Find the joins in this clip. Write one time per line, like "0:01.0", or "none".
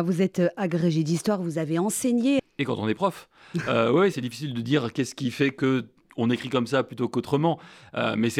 0:02.4
0:04.1